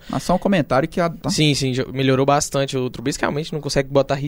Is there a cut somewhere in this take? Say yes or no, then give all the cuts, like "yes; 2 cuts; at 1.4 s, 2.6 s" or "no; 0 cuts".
yes; 1 cut; at 1.2 s